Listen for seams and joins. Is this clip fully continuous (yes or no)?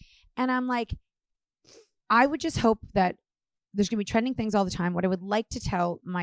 yes